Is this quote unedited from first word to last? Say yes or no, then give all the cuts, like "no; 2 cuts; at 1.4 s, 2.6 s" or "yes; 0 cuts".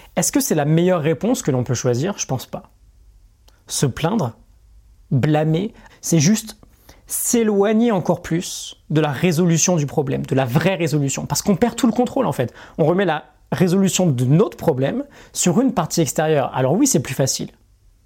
no; 2 cuts; at 5.9 s, 12.7 s